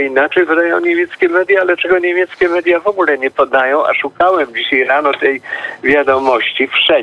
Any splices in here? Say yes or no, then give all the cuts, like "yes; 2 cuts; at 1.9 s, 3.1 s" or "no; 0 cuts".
no; 0 cuts